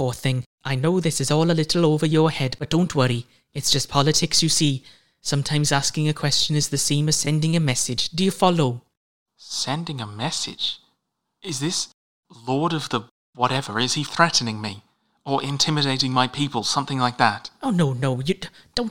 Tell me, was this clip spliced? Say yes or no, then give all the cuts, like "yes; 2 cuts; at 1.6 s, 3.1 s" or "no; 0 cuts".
no; 0 cuts